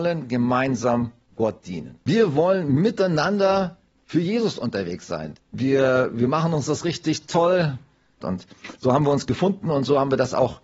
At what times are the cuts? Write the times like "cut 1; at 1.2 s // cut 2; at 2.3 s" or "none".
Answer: cut 1; at 2.0 s // cut 2; at 5.3 s // cut 3; at 8.2 s